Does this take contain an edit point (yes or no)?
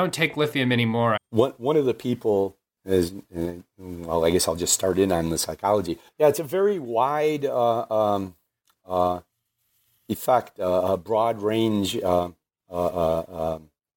yes